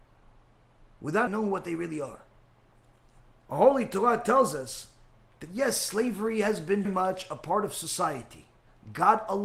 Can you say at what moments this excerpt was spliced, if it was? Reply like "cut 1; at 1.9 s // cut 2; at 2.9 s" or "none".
cut 1; at 1.3 s // cut 2; at 6.8 s

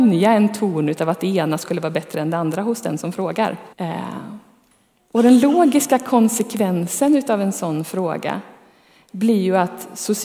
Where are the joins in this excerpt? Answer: cut 1; at 3.7 s

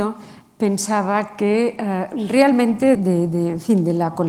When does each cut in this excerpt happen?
cut 1; at 2.9 s

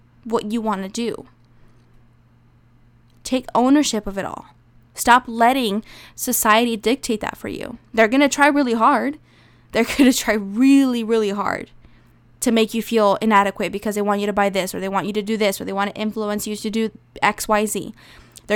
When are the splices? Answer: none

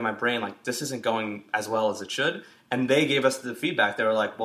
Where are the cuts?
none

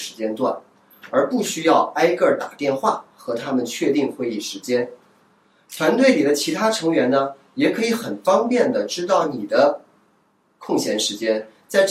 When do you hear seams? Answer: none

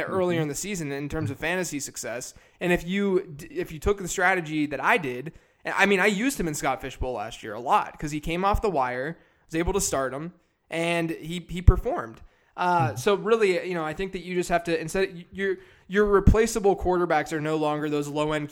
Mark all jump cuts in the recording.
none

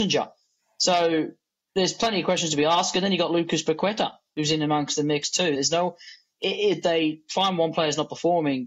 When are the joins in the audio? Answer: cut 1; at 5.6 s

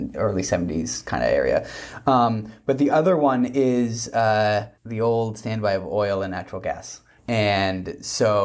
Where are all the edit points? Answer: cut 1; at 4.8 s // cut 2; at 7.2 s

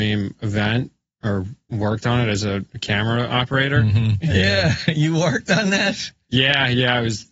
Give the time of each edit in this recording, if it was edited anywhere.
cut 1; at 4.2 s

